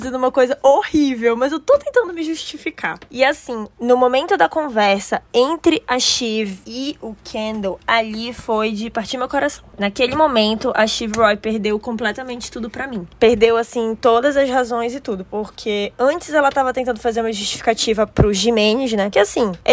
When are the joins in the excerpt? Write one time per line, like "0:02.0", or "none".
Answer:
none